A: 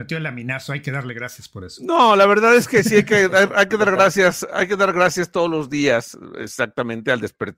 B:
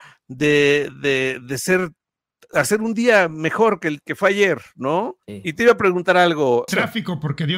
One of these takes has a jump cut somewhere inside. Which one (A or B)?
B